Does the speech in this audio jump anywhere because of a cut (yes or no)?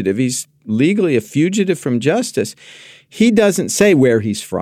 no